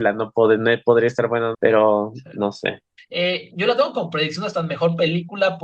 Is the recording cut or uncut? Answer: cut